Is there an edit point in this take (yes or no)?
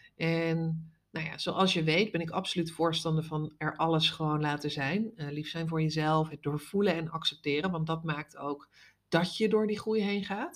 no